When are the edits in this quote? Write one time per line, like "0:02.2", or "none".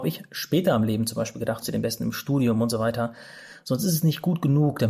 0:01.6